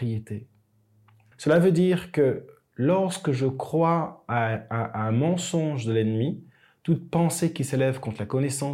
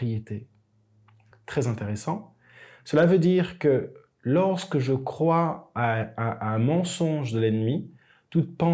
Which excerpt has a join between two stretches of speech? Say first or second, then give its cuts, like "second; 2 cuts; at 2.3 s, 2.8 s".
first; 1 cut; at 1.3 s